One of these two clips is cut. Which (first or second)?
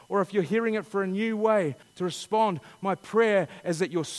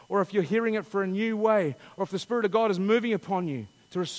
first